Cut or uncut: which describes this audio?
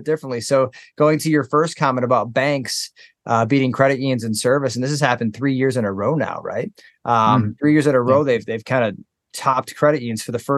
uncut